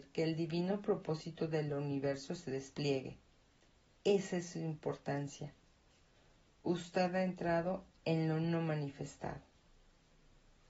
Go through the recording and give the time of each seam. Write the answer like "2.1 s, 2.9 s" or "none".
none